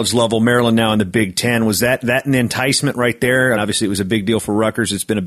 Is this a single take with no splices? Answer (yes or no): no